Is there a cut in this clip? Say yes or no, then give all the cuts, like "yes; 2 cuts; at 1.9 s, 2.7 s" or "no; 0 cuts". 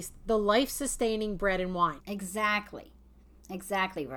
yes; 1 cut; at 2.0 s